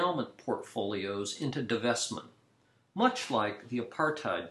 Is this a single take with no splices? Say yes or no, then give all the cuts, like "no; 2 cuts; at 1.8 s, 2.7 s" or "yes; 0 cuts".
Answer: yes; 0 cuts